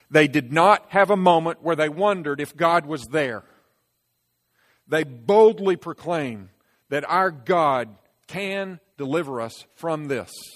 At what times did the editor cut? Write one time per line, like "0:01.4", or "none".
none